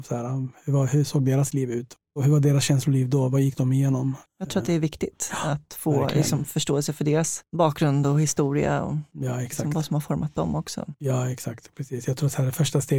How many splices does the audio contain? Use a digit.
1